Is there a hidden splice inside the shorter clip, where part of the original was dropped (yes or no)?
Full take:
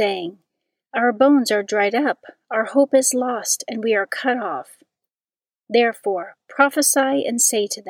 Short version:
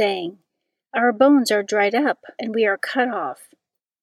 yes